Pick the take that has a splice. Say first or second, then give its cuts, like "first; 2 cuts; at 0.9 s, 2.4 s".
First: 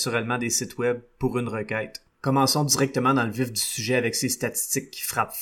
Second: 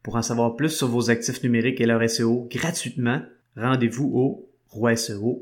first; 1 cut; at 2.2 s